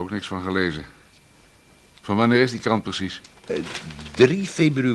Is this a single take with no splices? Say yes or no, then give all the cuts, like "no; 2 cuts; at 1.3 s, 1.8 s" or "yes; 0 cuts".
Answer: yes; 0 cuts